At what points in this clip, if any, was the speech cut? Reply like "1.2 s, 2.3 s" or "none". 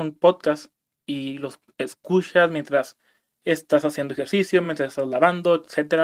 none